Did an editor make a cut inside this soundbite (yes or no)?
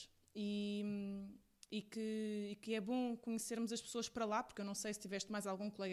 no